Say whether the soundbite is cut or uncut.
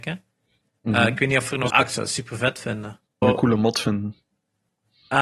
cut